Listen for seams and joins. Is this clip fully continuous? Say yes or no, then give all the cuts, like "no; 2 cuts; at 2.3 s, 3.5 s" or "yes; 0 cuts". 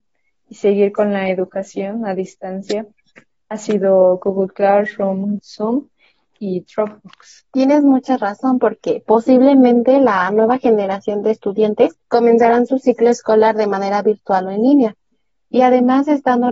no; 3 cuts; at 5.4 s, 7.5 s, 12.0 s